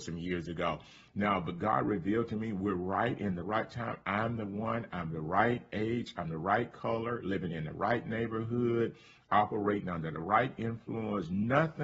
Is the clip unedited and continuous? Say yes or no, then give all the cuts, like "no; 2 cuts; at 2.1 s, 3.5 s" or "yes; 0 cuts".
yes; 0 cuts